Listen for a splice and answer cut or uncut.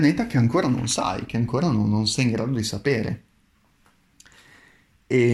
uncut